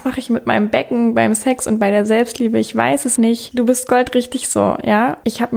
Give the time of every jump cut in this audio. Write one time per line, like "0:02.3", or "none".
0:03.2